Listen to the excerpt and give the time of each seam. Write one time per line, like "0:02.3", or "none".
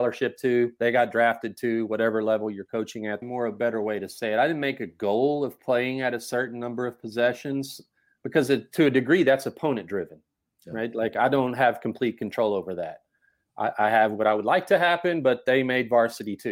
0:03.2